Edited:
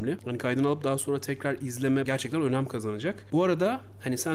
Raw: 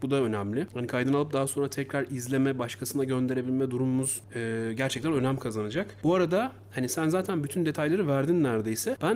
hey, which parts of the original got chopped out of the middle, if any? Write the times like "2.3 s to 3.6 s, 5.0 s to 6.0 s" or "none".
2.5 s to 4.8 s